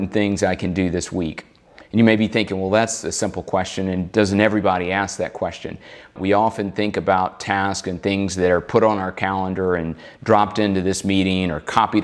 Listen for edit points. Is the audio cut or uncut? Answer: cut